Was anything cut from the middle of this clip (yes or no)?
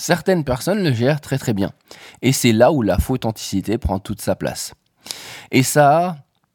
no